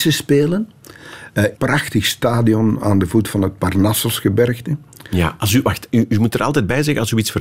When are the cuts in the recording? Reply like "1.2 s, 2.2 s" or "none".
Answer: 1.5 s